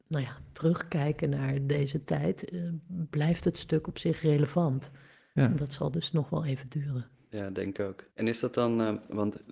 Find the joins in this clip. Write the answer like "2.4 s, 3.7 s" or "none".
8.1 s